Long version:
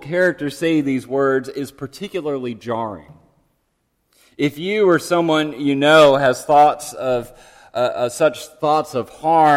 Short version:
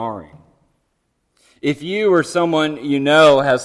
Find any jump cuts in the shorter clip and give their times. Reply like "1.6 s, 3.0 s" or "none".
none

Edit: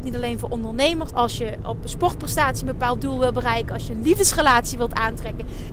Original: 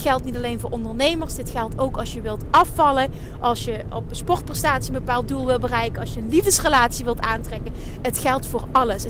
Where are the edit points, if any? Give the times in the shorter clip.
1.1 s

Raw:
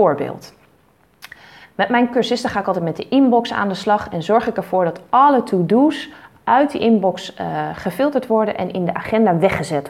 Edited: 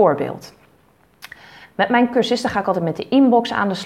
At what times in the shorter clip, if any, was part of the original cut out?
none

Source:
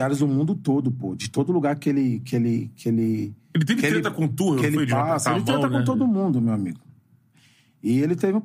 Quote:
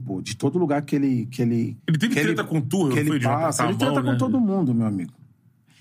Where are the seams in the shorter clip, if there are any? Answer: 1.8 s

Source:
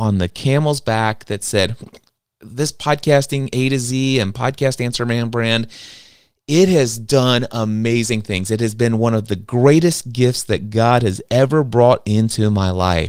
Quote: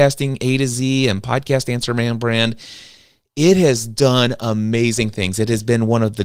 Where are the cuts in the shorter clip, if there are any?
none

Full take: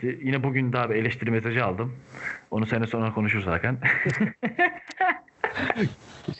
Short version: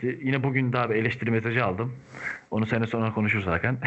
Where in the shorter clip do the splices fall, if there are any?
none

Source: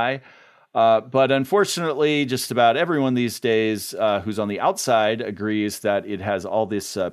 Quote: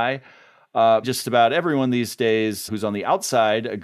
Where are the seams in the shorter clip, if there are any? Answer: 1.0 s, 2.7 s

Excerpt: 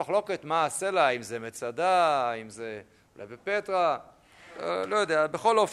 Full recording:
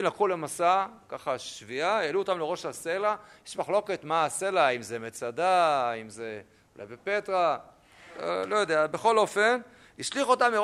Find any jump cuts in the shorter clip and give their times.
none

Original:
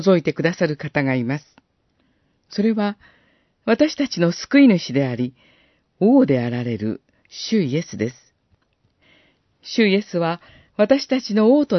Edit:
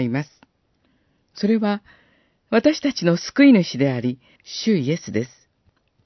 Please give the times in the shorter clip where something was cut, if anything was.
4.4 s

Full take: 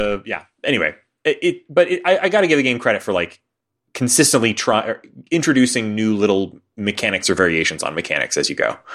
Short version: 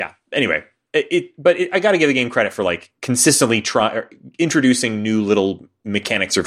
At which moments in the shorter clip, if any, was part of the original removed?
1.7 s, 3.0 s

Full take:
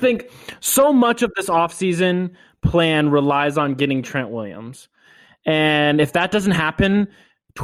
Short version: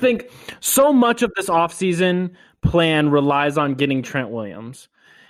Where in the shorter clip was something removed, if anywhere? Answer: none

